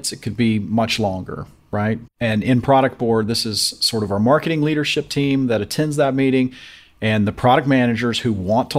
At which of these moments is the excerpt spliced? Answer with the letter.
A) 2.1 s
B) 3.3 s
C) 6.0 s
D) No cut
A